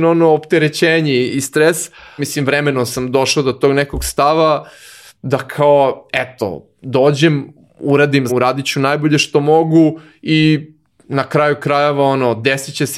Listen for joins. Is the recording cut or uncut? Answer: cut